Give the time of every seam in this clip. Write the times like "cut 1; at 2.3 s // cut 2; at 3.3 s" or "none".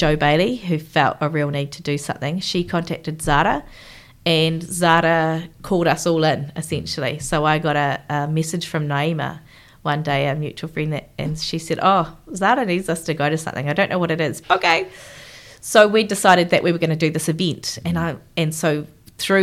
cut 1; at 14.4 s